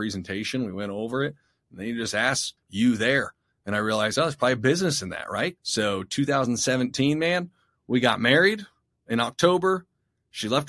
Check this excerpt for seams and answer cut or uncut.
cut